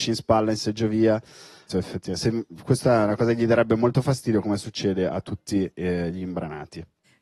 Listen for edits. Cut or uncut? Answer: cut